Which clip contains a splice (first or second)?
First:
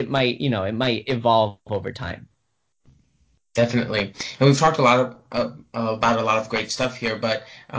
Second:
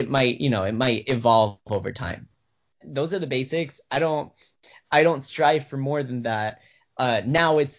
second